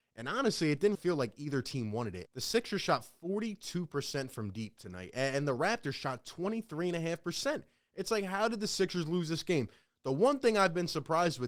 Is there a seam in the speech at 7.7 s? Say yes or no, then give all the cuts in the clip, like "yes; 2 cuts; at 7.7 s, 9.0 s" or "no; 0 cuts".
no; 2 cuts; at 0.9 s, 2.3 s